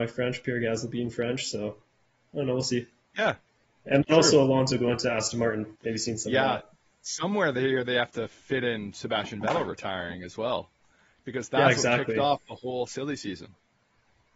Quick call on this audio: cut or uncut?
cut